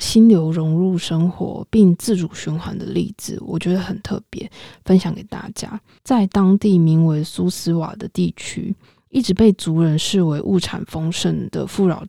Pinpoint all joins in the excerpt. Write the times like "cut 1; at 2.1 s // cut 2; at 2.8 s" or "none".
cut 1; at 6.0 s